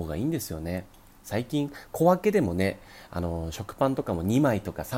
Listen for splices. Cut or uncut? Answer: uncut